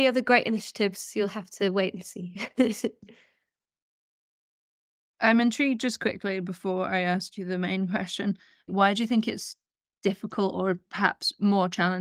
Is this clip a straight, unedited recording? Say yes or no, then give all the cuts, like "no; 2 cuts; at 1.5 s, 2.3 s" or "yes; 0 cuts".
yes; 0 cuts